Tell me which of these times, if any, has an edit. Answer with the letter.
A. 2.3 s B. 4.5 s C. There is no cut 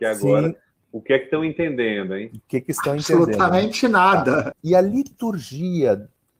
B